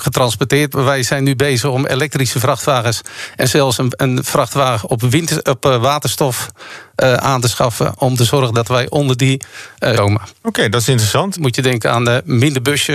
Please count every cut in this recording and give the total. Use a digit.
2